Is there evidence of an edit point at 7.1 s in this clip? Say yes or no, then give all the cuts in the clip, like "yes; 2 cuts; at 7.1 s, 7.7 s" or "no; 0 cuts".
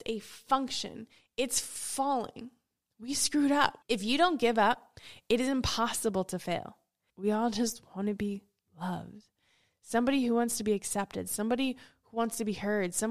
yes; 2 cuts; at 3.8 s, 7.1 s